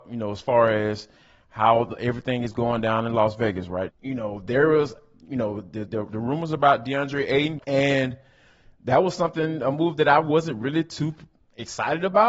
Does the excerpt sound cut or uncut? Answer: cut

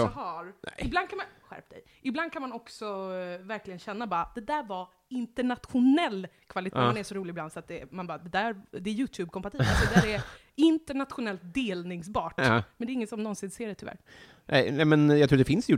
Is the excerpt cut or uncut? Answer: cut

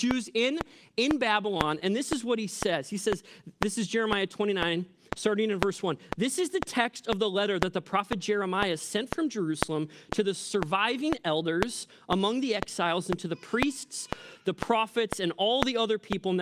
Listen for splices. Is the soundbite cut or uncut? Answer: uncut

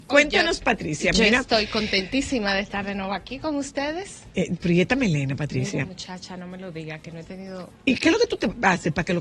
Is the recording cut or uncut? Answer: uncut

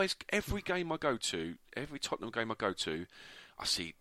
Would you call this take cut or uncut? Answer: uncut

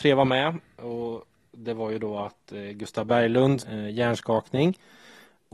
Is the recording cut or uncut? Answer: cut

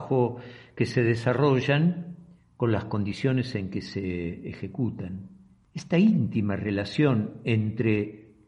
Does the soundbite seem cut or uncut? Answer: uncut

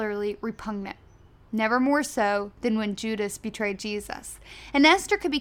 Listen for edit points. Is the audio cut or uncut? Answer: uncut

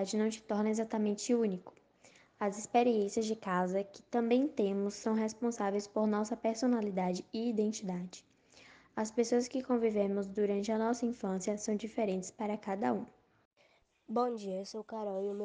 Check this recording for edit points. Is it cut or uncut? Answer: uncut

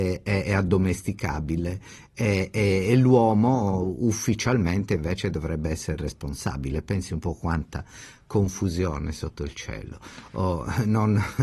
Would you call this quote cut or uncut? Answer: uncut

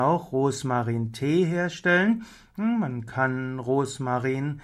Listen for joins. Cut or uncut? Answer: uncut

